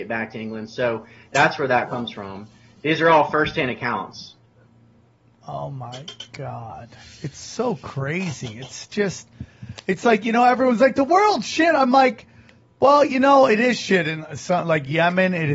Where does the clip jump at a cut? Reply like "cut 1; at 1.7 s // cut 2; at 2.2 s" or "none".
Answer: none